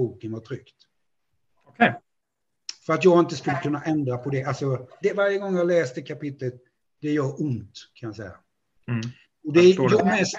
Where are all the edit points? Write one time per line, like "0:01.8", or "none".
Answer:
0:05.0